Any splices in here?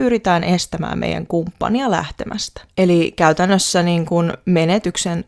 no; 0 cuts

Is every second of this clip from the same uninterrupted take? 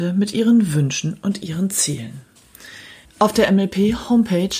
no; 1 cut; at 3.1 s

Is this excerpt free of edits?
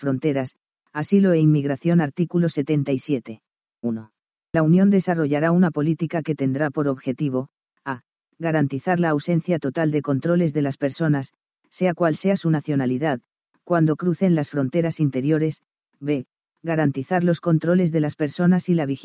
yes; 0 cuts

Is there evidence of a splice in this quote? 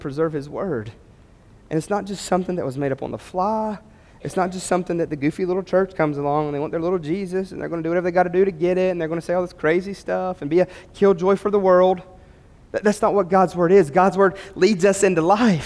no; 0 cuts

